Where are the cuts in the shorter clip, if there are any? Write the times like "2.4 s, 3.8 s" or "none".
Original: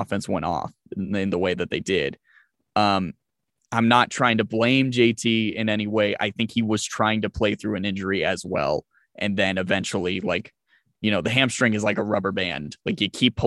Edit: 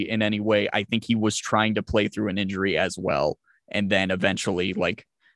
none